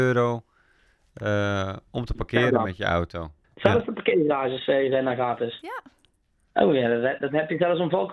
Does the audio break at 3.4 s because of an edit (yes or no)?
yes